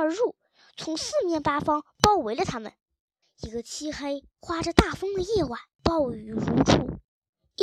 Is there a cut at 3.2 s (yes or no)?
yes